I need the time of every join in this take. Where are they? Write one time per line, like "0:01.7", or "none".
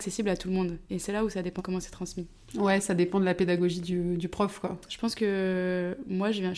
0:01.6
0:04.9